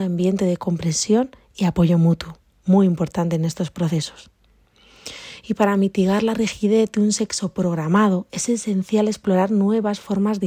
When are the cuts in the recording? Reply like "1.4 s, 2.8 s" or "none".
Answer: none